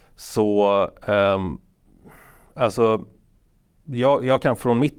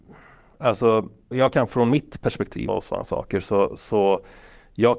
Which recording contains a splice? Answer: second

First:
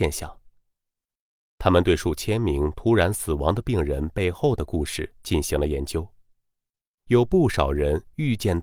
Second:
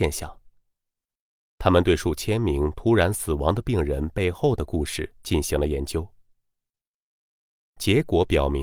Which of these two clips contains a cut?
first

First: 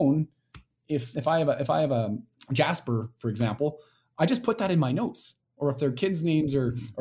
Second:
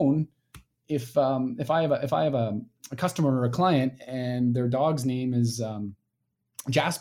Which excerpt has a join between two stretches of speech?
first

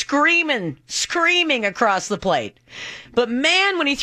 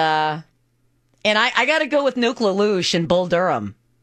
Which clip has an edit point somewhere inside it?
first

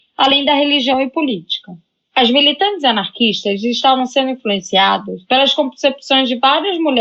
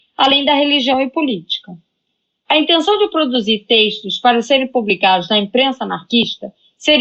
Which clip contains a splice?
first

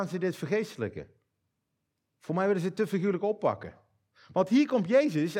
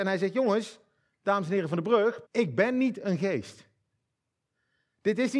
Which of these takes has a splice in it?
second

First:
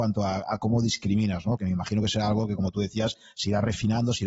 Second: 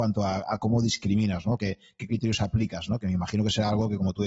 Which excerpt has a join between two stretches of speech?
first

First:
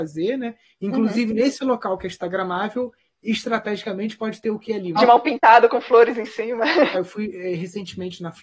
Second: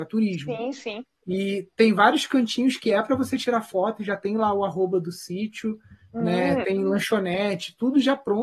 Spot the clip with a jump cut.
first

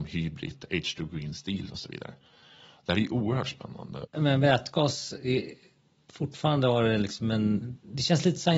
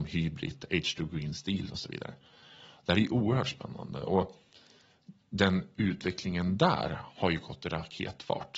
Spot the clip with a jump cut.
first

